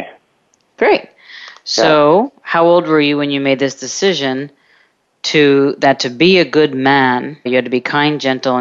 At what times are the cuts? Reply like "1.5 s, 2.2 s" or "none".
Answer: 7.5 s